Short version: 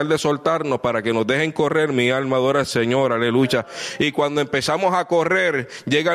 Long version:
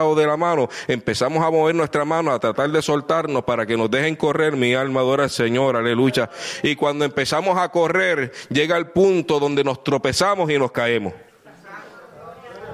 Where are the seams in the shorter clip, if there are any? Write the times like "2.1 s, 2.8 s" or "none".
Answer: none